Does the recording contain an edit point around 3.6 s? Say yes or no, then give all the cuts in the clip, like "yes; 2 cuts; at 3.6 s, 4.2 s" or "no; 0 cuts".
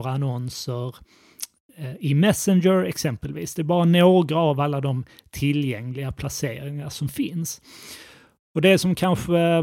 no; 0 cuts